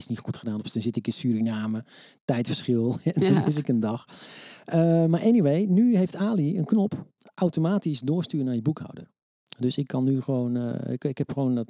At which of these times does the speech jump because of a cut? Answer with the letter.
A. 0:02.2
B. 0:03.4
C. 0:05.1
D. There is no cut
D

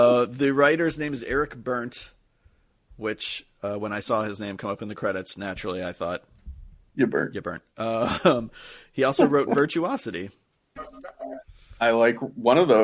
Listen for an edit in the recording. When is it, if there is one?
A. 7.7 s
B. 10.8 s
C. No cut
B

